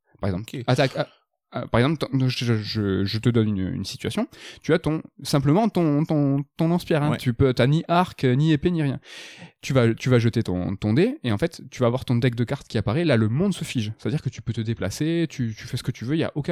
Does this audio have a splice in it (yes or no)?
no